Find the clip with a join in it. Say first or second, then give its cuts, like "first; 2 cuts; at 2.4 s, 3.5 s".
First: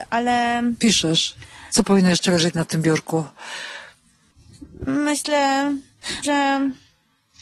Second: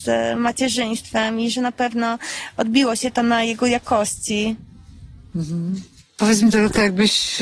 first; 2 cuts; at 1.7 s, 6.2 s